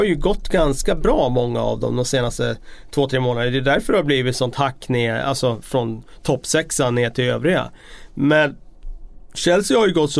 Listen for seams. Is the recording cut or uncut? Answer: uncut